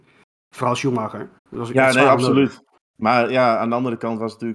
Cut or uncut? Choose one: cut